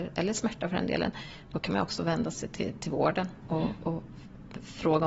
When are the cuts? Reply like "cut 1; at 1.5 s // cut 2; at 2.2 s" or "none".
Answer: none